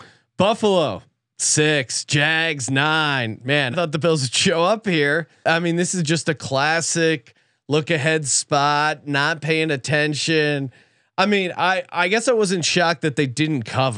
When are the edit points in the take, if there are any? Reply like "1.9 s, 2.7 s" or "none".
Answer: 3.7 s, 5.4 s